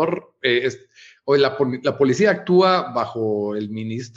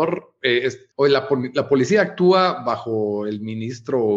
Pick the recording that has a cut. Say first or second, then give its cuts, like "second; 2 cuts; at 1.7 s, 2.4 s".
second; 1 cut; at 0.9 s